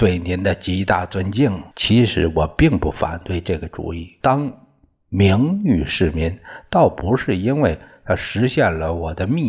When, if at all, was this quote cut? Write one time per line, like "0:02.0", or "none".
0:01.7
0:04.2